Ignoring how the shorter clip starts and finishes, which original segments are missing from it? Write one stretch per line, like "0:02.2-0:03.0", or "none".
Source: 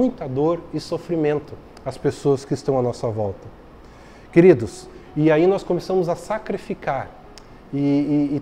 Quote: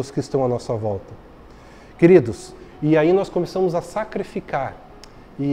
none